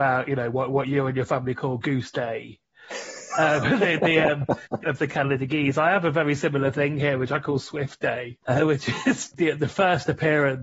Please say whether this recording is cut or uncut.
cut